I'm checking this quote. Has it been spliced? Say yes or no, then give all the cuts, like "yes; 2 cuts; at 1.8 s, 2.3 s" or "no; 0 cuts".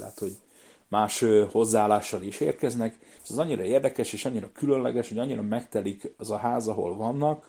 yes; 1 cut; at 3.2 s